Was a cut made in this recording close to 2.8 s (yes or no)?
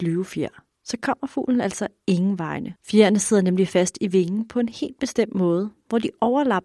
yes